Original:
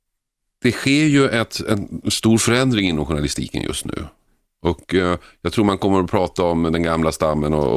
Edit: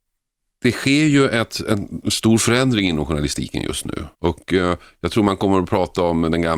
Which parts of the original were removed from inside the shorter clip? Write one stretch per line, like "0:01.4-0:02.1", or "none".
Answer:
0:04.1-0:04.5

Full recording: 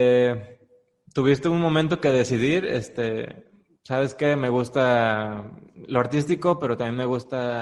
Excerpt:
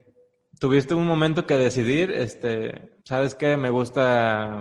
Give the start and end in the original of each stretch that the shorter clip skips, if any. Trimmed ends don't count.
0:03.5-0:03.8

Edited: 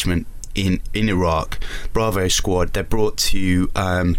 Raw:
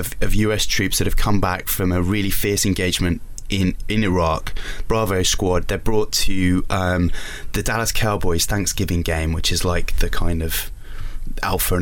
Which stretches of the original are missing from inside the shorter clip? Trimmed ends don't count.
none

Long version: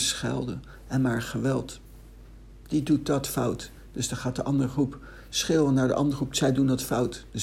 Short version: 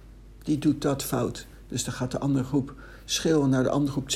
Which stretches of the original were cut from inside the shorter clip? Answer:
none

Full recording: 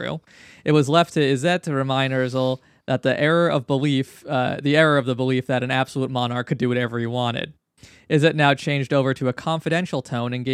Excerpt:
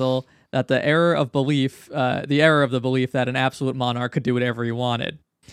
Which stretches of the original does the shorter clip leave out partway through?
none

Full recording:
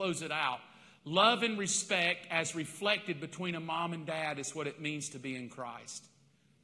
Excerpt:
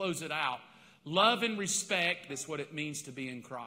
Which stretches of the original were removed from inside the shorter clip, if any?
0:02.3-0:04.3

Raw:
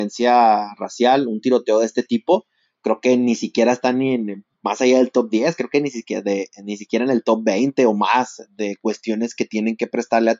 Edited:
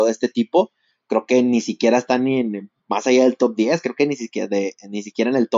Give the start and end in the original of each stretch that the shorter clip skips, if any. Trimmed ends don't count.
none

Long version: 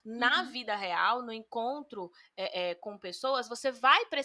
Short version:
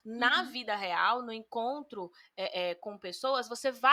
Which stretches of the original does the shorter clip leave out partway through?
none

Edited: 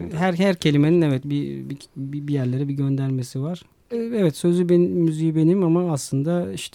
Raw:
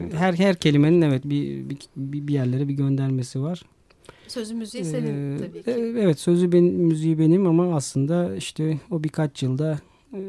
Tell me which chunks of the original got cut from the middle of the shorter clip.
0:03.9-0:05.7

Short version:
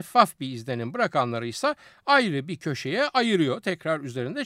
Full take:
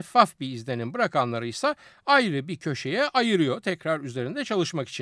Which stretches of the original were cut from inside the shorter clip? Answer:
none

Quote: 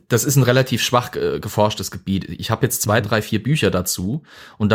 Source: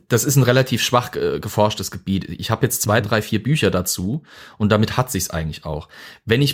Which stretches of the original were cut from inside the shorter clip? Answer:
none

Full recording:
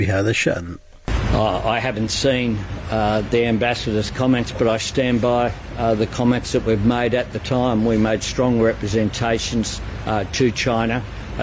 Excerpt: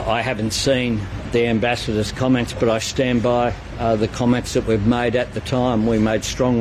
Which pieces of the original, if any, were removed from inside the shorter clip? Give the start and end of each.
0:02.8-0:03.2

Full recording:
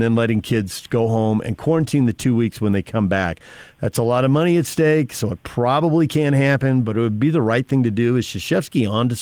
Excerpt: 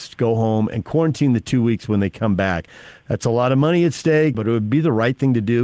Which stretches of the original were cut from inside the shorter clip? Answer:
0:05.1-0:06.8

